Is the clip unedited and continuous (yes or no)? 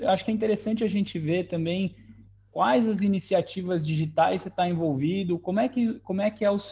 yes